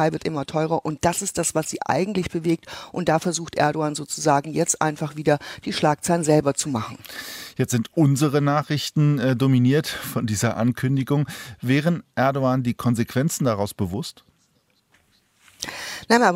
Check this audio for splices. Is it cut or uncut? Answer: uncut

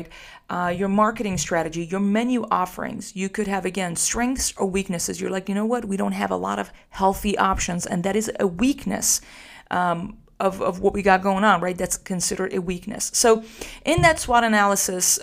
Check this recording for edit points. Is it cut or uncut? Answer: uncut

